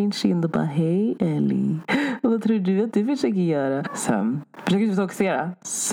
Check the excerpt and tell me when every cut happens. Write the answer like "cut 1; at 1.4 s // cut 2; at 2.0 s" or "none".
cut 1; at 3.8 s